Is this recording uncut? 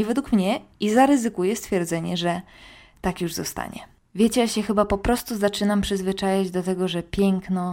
yes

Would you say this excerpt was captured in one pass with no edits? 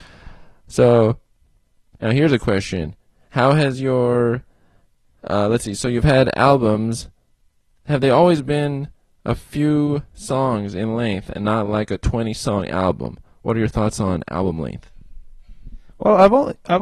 yes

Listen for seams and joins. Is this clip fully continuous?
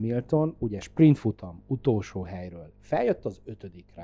yes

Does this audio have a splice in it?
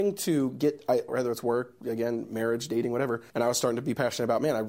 yes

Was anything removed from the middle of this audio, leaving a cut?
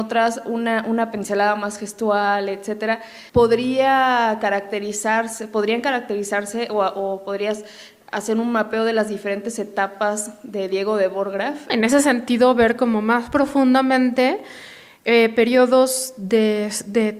yes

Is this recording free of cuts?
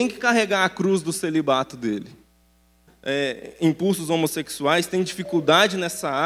no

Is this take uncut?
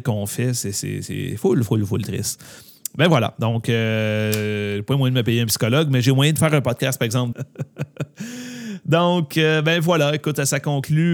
no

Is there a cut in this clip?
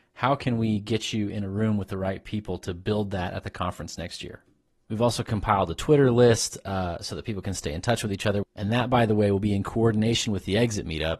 yes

